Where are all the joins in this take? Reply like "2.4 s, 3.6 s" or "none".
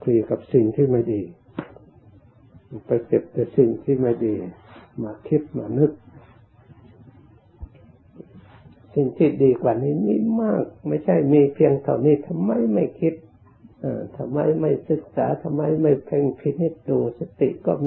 13.7 s